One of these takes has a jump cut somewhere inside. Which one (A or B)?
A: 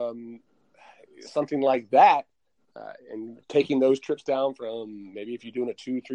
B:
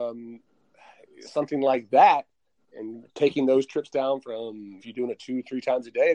B